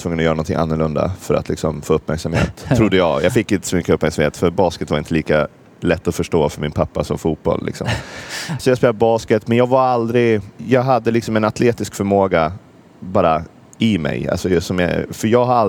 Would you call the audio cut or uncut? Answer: cut